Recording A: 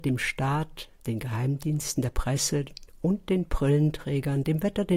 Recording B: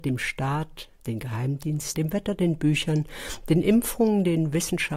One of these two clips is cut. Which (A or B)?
B